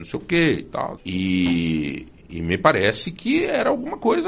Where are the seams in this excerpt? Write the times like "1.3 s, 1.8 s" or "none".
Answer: 1.0 s